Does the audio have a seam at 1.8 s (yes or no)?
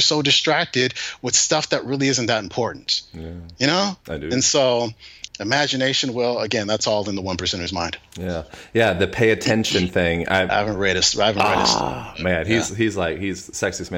no